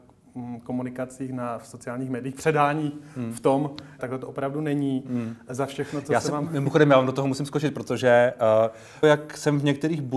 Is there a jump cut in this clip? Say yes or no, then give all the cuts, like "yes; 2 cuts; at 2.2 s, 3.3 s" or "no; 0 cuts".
yes; 2 cuts; at 4.0 s, 9.0 s